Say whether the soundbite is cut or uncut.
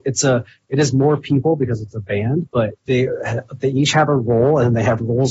cut